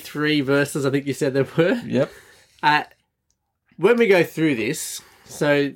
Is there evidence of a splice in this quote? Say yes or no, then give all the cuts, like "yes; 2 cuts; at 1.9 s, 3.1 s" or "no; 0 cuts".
no; 0 cuts